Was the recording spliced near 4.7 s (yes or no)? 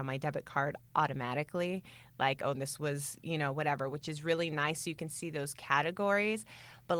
no